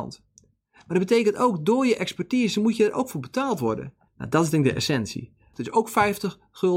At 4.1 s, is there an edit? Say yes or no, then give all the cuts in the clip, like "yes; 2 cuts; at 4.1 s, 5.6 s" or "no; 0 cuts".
yes; 2 cuts; at 4.1 s, 5.5 s